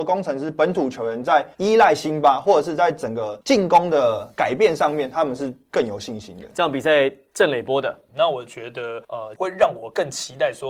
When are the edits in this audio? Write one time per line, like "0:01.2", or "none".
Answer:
0:08.1
0:09.4